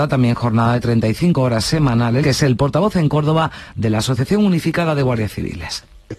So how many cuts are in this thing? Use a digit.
1